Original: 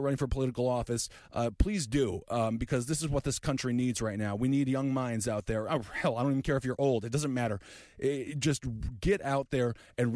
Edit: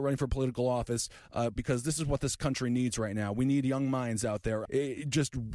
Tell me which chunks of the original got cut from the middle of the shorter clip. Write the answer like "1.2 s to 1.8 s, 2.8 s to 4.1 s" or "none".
1.6 s to 2.6 s, 5.7 s to 7.9 s